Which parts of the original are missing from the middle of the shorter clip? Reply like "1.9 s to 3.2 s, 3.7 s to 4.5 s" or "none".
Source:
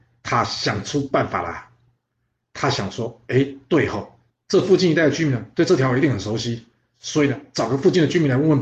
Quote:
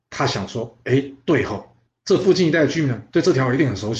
none